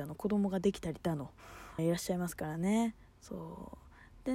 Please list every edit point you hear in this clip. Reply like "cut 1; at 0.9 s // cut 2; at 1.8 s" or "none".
cut 1; at 1.8 s

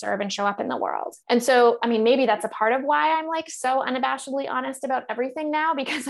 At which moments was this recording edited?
cut 1; at 1.2 s

